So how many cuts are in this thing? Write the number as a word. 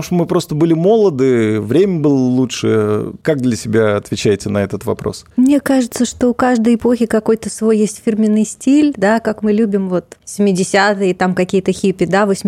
zero